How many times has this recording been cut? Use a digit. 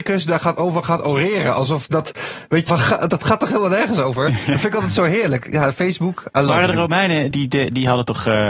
2